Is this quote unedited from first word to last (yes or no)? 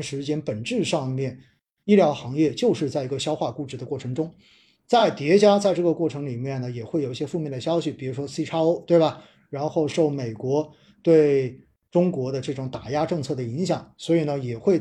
yes